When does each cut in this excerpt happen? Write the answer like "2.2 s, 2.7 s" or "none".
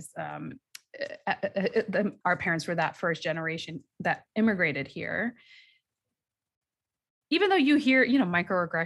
2.2 s, 7.2 s